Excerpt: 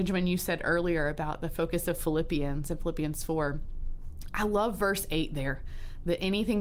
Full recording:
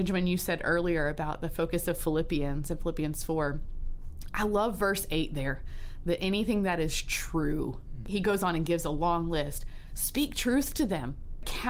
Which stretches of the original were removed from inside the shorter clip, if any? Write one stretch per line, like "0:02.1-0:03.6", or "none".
none